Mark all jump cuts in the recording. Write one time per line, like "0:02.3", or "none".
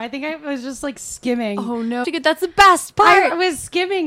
0:02.0